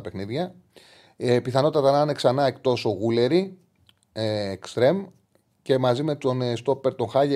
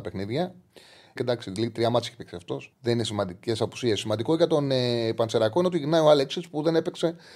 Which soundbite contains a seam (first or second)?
second